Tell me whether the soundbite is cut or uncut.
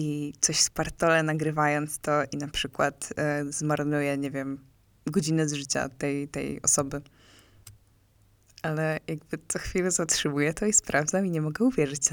uncut